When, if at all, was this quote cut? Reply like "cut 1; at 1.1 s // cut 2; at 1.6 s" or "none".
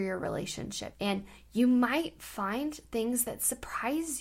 cut 1; at 0.9 s

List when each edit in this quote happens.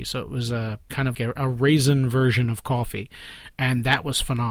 cut 1; at 1.1 s

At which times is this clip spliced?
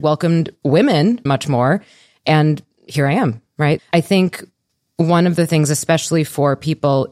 cut 1; at 1.3 s // cut 2; at 3.8 s

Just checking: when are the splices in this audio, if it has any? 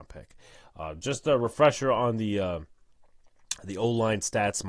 none

